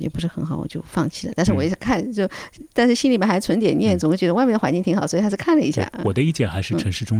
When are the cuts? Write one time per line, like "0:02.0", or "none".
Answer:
none